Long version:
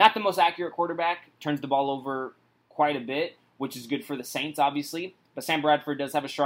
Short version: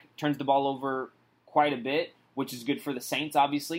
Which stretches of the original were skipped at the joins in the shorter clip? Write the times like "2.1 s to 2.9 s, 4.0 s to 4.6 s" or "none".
none